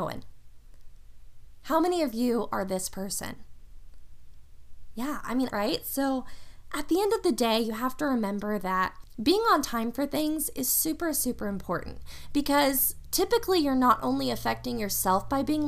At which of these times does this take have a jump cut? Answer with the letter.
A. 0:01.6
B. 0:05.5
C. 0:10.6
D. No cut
B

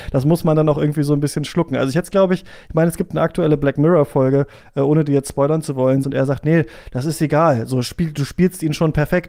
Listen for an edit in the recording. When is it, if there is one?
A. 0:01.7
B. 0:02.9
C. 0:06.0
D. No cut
C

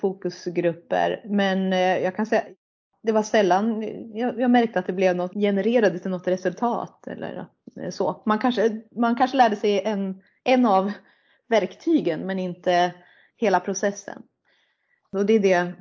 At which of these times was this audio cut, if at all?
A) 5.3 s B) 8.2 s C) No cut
A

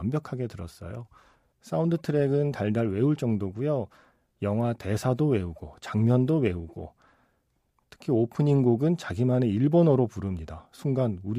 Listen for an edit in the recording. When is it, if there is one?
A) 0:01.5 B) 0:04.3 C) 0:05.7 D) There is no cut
A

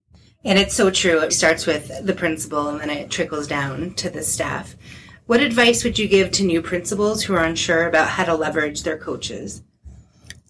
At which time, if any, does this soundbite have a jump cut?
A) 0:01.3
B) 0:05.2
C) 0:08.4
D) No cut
A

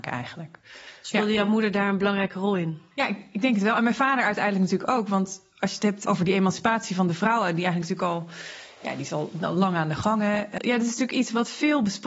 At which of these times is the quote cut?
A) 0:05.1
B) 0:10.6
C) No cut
B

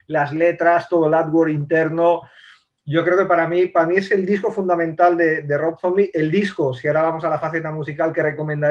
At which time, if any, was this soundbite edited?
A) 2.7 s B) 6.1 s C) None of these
C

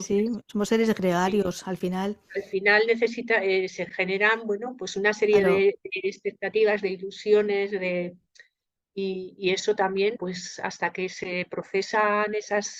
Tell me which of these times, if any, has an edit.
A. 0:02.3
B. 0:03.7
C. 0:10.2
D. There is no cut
C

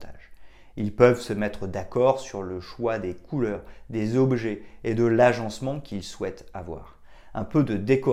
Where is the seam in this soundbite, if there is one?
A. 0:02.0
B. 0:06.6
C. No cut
C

